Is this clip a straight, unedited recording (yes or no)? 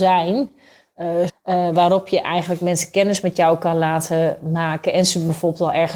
no